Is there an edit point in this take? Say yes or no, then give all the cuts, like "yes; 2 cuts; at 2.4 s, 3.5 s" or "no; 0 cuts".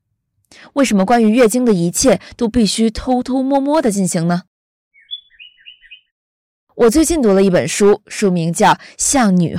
no; 0 cuts